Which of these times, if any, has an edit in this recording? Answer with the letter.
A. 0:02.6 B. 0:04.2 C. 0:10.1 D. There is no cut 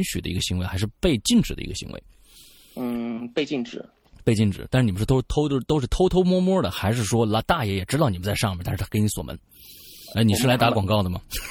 C